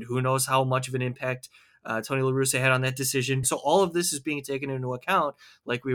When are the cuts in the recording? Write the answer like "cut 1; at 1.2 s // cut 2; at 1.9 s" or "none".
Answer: cut 1; at 3.4 s